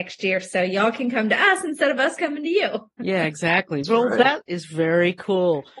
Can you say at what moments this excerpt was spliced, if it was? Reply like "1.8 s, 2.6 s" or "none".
none